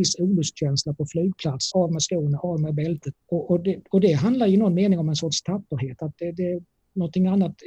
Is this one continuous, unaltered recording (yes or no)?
no